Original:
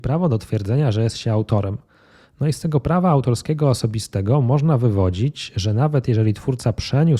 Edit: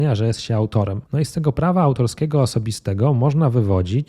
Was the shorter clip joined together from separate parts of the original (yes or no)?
yes